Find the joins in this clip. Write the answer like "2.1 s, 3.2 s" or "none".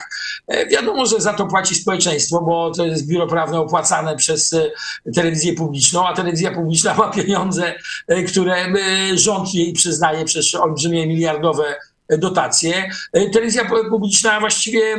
2.7 s